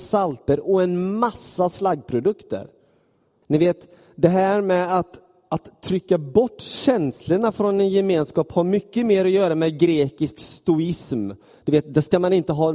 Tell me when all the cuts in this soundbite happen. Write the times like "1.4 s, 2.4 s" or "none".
3.4 s